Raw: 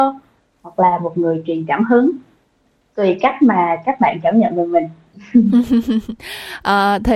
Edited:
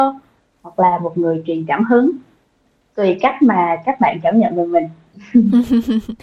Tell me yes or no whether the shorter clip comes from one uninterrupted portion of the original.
yes